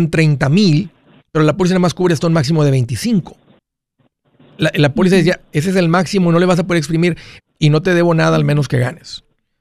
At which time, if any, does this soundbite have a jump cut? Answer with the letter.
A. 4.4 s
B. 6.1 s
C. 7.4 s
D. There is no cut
C